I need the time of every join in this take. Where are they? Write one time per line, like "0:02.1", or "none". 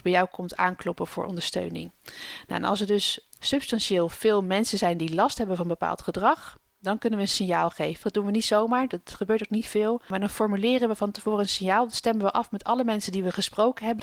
0:08.0